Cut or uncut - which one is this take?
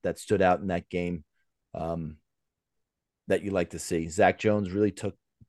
uncut